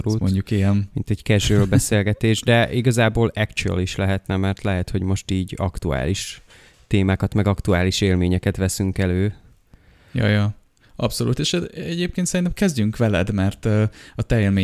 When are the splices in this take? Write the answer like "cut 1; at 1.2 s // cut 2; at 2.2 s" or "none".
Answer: none